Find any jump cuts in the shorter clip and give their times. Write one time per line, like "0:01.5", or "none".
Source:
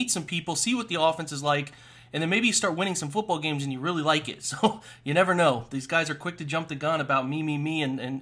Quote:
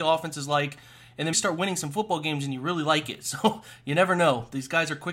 0:01.3